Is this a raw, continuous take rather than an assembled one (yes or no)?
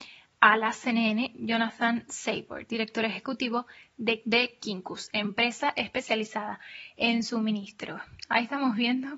yes